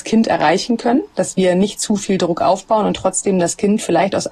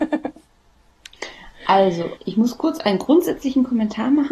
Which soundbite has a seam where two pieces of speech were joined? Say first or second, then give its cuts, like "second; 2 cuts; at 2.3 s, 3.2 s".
second; 1 cut; at 2.2 s